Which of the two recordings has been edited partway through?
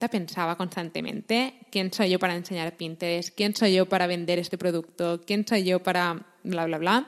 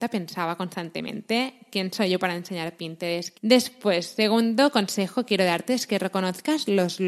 second; 1 cut; at 3.3 s

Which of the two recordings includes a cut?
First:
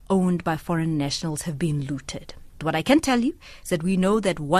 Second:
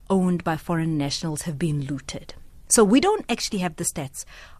first; 1 cut; at 2.6 s

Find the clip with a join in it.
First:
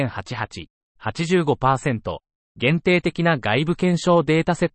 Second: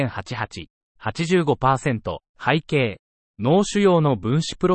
second; 1 cut; at 2.3 s

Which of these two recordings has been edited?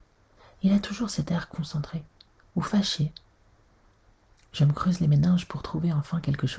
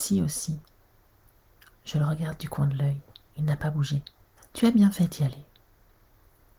second; 1 cut; at 4.4 s

